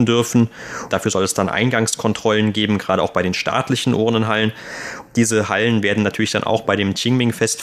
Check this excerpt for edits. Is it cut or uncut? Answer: cut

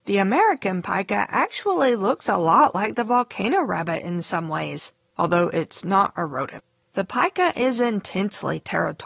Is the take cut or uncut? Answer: cut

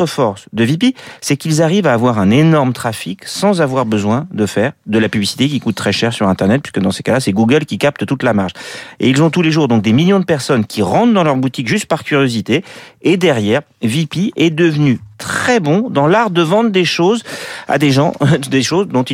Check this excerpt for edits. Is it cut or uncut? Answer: uncut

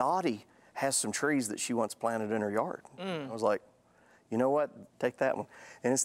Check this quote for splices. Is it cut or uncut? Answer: cut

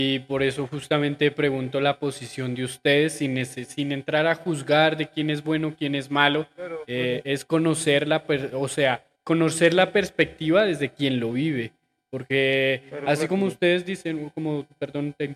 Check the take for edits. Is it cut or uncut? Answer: cut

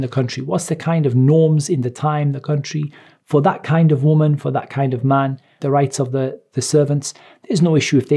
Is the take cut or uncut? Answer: cut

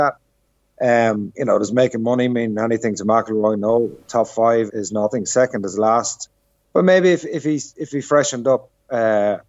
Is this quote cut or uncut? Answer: cut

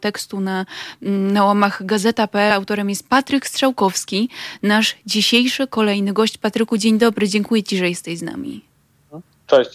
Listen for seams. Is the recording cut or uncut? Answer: uncut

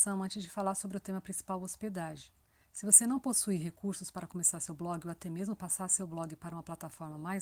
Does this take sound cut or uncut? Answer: uncut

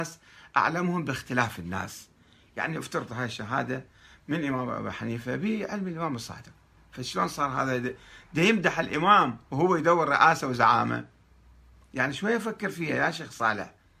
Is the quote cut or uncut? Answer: uncut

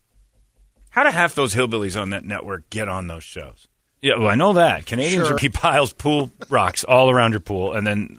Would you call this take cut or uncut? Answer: cut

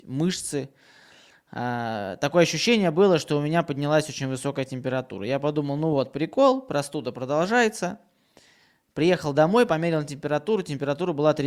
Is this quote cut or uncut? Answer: uncut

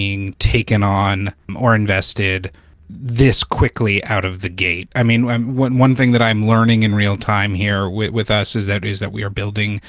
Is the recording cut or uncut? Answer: uncut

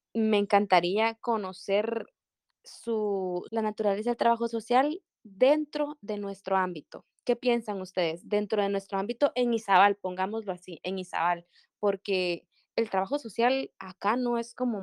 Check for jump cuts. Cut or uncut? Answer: cut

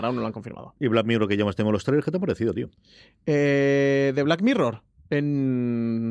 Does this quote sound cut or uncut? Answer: uncut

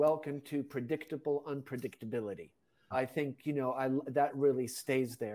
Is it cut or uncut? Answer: cut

